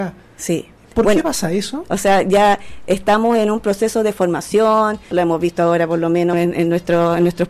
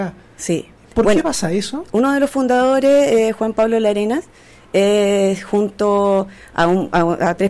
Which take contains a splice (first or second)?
first